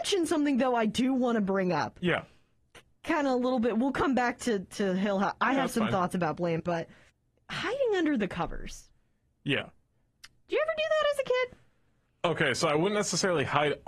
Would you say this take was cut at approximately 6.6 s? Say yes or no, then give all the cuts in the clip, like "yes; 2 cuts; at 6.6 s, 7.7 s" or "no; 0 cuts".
yes; 1 cut; at 6.6 s